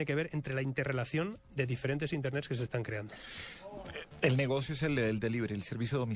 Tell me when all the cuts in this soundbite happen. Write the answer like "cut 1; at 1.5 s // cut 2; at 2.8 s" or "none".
none

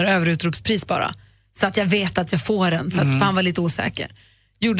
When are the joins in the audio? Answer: none

